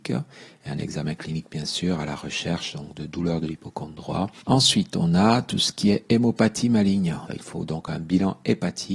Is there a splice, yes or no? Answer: yes